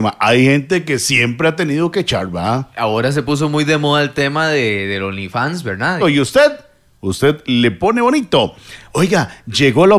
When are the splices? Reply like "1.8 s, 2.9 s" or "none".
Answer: 6.0 s

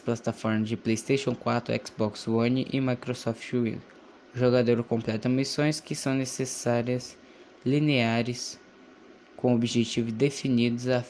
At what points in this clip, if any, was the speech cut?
none

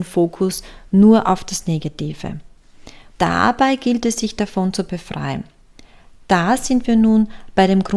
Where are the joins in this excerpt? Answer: 3.1 s

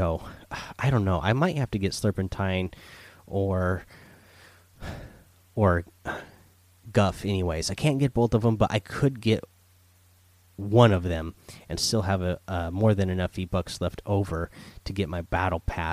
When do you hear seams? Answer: none

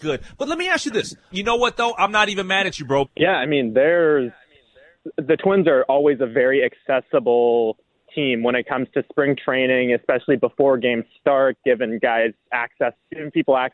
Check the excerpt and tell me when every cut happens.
1.3 s, 3.0 s

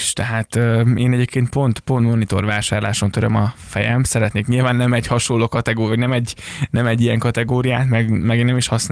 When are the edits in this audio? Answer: none

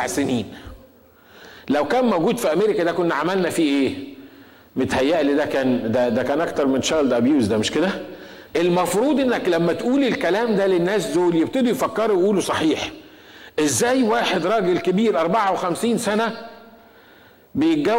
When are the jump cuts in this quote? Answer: 8.5 s

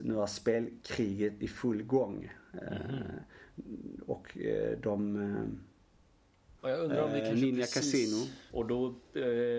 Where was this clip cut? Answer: 6.6 s, 8.5 s

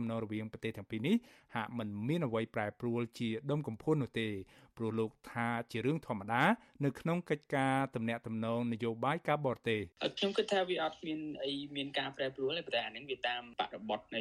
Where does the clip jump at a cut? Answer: 9.9 s

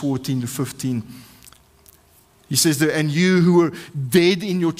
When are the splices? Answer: none

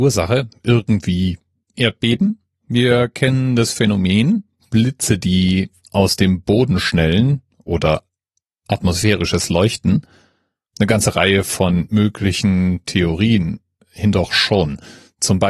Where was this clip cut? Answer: 10.7 s

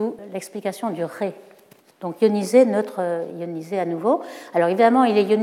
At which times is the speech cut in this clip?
none

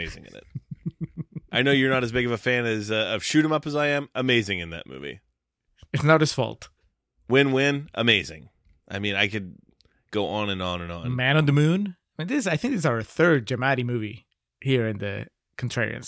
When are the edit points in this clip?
none

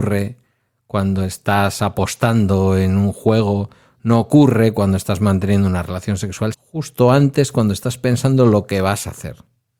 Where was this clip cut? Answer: 6.5 s

